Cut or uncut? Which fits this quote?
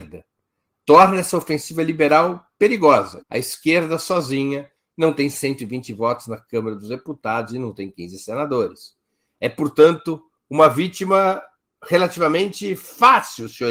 cut